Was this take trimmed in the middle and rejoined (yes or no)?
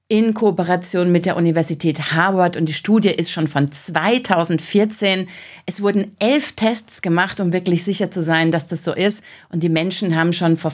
no